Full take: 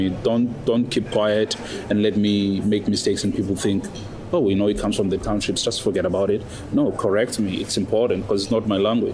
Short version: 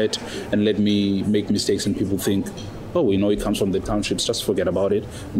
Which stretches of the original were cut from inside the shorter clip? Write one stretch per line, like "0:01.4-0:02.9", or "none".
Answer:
none

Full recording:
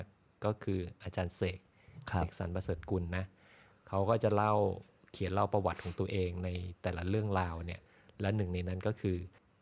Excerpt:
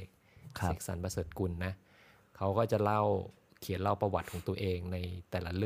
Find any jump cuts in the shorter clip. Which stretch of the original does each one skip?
none

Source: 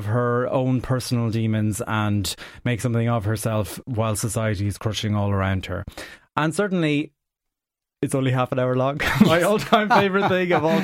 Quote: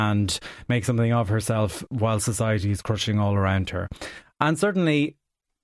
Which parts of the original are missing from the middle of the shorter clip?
none

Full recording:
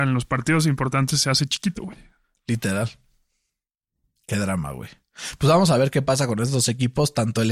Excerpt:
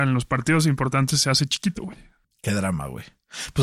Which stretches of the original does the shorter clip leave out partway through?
0:02.2-0:04.1

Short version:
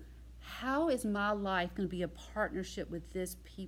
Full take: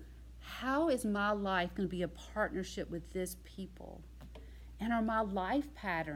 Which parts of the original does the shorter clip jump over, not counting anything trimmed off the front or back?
none

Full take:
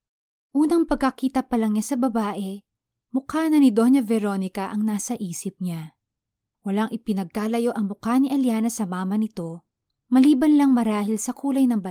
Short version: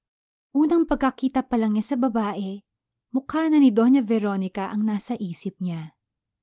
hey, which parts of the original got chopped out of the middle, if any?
none

